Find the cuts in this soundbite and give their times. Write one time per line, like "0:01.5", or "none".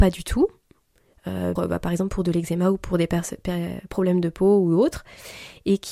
0:01.6